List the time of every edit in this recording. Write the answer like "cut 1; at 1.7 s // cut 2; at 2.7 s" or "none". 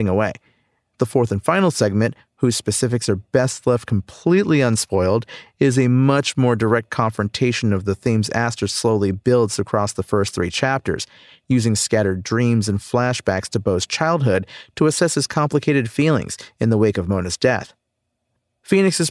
cut 1; at 0.9 s